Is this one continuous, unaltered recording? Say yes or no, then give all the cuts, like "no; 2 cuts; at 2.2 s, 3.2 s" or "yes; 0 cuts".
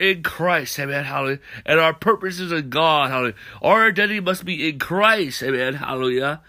yes; 0 cuts